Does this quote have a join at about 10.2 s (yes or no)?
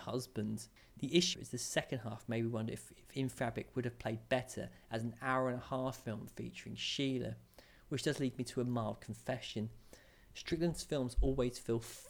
no